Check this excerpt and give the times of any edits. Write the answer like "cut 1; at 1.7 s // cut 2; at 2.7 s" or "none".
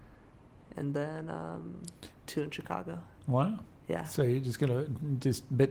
none